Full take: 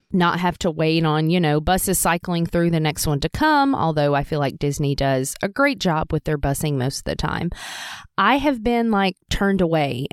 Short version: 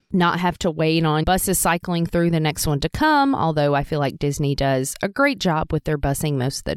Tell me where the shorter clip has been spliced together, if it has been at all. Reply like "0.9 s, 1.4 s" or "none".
1.2 s